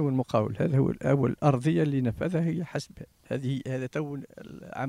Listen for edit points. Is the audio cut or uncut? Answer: uncut